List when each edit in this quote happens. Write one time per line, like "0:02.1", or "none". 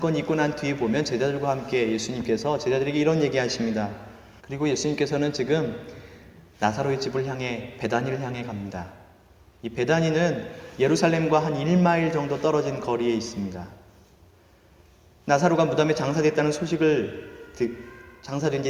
0:04.4